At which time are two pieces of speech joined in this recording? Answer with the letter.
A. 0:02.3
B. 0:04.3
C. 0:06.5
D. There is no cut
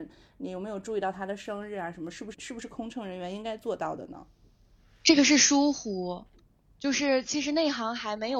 A